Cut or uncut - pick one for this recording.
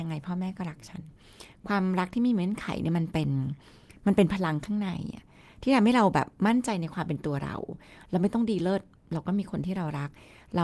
uncut